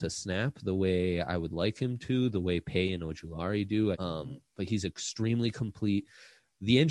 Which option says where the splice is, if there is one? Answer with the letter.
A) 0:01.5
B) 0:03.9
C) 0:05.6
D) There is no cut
B